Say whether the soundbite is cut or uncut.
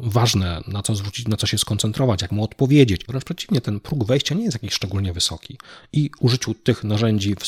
cut